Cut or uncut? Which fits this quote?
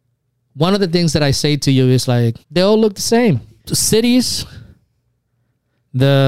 cut